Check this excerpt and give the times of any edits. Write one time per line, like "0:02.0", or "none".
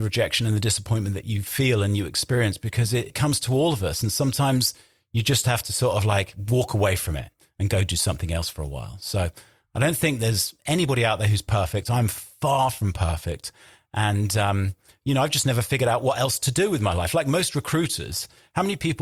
none